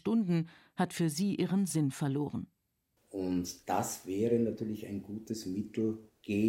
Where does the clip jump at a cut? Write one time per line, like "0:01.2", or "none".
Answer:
0:03.0